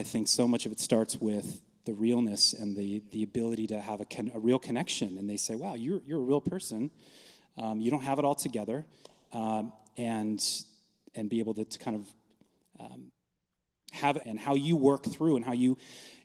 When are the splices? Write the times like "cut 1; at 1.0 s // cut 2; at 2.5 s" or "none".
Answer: cut 1; at 14.2 s